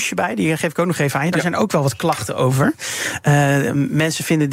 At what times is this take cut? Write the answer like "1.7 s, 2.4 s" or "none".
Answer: none